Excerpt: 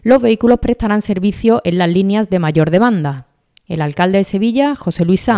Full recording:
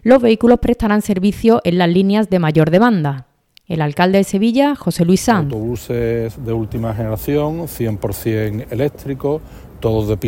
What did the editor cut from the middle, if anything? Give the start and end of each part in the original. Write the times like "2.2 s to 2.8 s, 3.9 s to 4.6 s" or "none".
none